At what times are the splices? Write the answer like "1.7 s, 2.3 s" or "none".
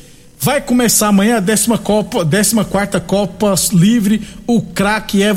none